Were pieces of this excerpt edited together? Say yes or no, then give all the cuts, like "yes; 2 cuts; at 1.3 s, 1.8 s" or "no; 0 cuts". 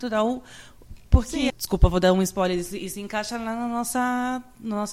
yes; 1 cut; at 1.5 s